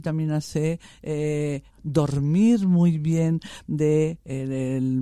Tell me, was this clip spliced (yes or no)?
yes